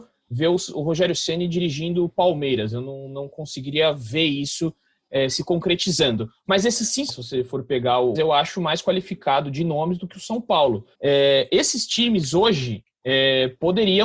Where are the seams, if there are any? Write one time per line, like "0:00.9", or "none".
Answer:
0:07.1
0:08.1
0:10.9